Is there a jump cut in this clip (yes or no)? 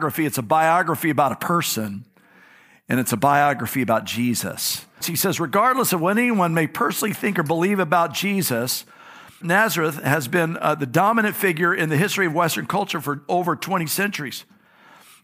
yes